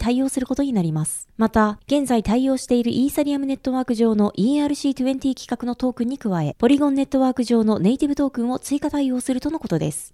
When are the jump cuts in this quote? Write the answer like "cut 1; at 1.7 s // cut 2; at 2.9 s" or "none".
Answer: cut 1; at 1.8 s